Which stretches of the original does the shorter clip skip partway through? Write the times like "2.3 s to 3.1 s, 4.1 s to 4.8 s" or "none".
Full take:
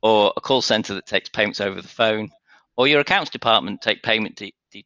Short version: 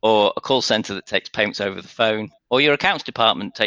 2.4 s to 2.7 s